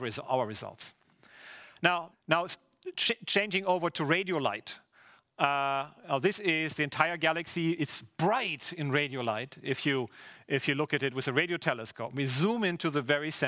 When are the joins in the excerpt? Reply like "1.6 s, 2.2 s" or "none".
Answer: 2.1 s